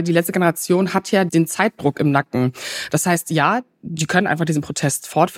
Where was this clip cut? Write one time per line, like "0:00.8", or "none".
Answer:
none